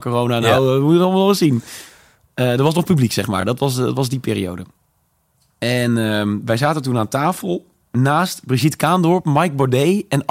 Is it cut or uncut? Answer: uncut